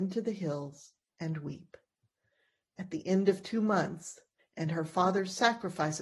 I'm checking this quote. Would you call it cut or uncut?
cut